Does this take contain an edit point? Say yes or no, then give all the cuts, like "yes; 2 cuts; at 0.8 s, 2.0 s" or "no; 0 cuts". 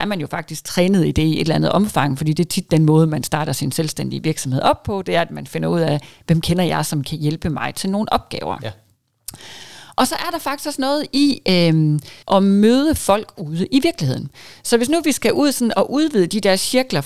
yes; 1 cut; at 12.2 s